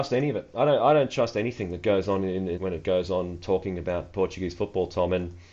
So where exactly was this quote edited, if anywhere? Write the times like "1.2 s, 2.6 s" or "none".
2.6 s